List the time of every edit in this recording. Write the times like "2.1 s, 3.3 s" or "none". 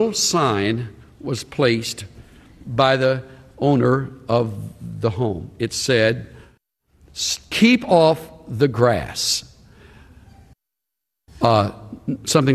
none